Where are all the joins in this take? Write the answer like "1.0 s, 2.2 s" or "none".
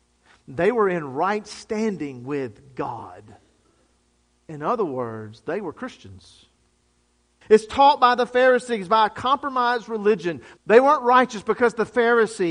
7.4 s, 10.6 s

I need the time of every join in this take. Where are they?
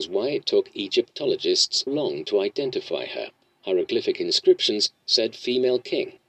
1.9 s

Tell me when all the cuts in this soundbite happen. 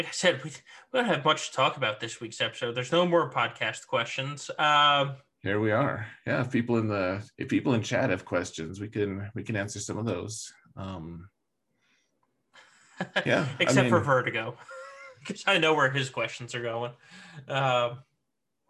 4.6 s, 7.3 s

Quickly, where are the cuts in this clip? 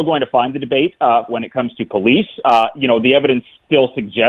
1.3 s

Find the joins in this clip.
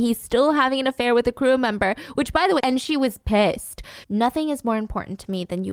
2.6 s, 4.0 s

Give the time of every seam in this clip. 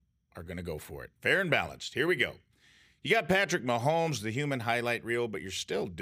none

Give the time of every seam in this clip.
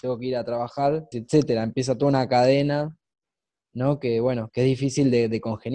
1.1 s

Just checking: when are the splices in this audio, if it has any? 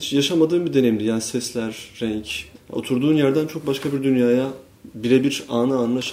2.5 s

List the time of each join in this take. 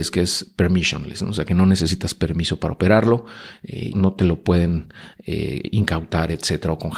3.9 s

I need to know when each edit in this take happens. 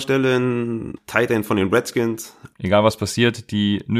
1.0 s, 2.5 s

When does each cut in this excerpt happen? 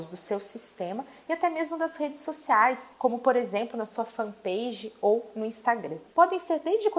6.1 s

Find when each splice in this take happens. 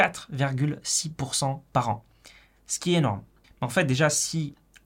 3.4 s

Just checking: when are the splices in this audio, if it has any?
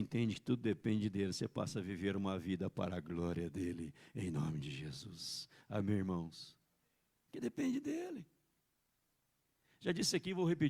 none

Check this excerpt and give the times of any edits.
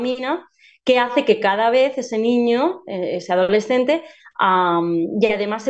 4.2 s

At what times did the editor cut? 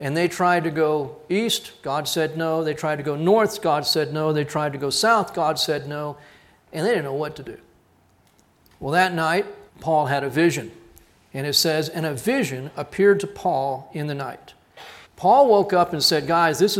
9.7 s, 15.1 s

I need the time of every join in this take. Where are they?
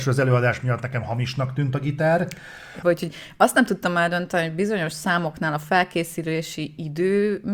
2.8 s

